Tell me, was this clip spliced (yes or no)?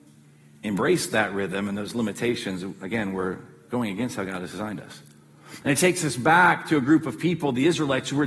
yes